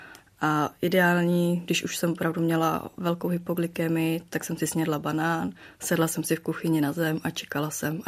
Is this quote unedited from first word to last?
yes; 0 cuts

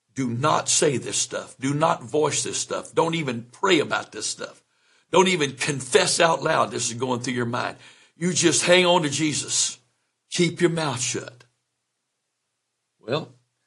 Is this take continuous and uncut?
yes; 0 cuts

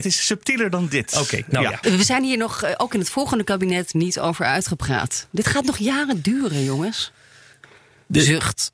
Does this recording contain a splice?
yes; 1 cut; at 1.8 s

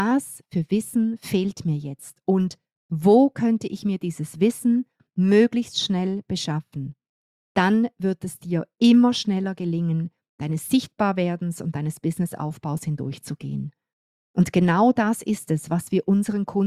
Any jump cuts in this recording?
yes; 1 cut; at 10.3 s

